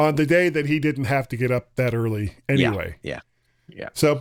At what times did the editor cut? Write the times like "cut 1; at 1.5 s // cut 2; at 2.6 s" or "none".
none